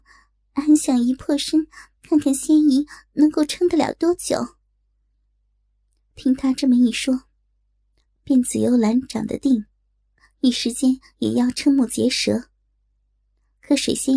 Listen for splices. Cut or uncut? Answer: cut